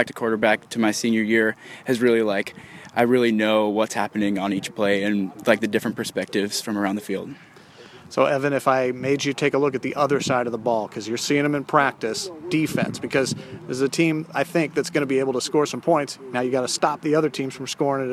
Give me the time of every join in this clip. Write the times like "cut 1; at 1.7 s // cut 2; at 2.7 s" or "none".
none